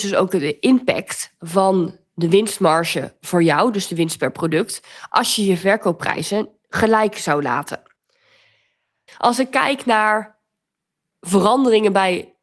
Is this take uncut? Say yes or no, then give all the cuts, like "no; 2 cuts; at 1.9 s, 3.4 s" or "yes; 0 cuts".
no; 1 cut; at 9.1 s